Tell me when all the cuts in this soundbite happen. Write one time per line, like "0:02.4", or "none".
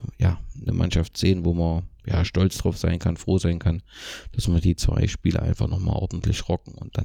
none